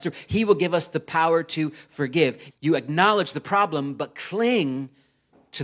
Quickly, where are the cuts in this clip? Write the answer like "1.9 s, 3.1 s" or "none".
2.5 s